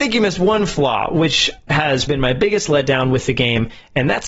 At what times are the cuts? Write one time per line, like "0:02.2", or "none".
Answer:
0:02.1